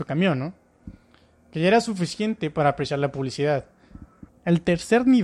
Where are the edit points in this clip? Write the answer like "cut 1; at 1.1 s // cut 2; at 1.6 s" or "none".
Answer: cut 1; at 4.3 s